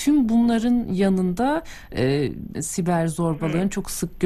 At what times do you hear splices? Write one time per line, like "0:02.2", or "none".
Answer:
0:02.5